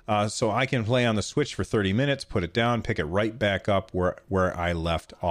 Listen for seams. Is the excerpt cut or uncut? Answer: uncut